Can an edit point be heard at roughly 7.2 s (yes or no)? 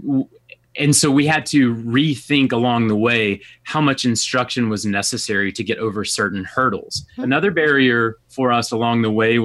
yes